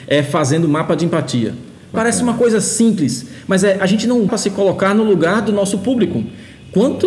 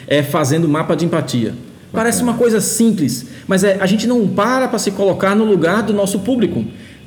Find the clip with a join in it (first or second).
first